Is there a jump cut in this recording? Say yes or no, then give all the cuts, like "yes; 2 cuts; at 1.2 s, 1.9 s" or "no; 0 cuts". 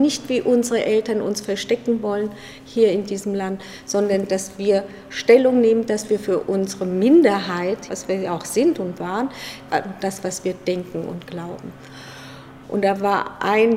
yes; 3 cuts; at 7.9 s, 9.7 s, 12.6 s